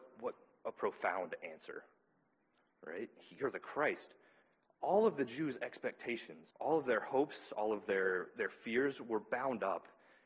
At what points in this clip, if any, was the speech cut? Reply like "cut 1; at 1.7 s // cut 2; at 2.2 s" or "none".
cut 1; at 6.5 s